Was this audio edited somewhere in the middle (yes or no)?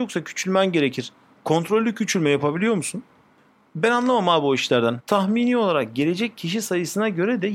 yes